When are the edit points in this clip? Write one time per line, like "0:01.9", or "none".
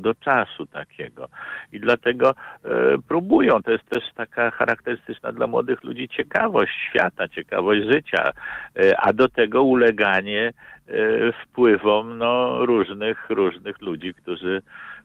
none